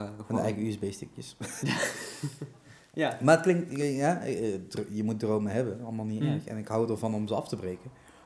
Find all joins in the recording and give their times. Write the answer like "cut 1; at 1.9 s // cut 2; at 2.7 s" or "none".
cut 1; at 1.6 s